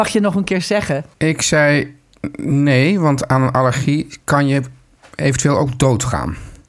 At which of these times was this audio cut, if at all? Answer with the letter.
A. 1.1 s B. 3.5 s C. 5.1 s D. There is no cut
A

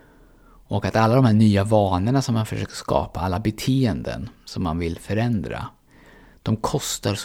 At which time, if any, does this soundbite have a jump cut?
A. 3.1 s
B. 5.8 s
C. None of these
C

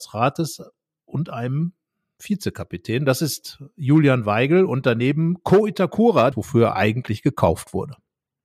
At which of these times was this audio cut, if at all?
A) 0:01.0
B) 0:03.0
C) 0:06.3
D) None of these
C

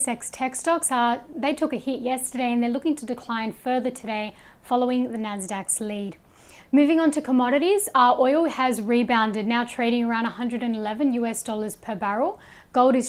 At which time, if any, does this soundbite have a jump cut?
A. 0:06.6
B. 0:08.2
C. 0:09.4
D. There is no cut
A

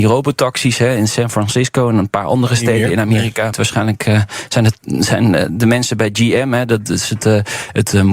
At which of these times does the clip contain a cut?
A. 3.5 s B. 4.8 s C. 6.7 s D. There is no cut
A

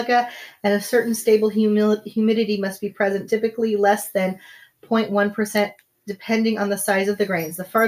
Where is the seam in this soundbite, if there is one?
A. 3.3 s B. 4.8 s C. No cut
C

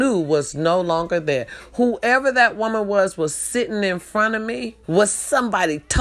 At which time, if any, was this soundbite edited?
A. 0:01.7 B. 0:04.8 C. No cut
B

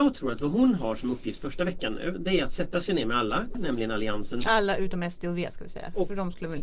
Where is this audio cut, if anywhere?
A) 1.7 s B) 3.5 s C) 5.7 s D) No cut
B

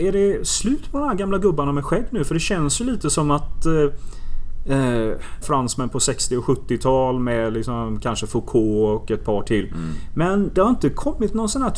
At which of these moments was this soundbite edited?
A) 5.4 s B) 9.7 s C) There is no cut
A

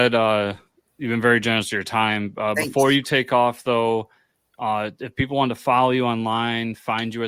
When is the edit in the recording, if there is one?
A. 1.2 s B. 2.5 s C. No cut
C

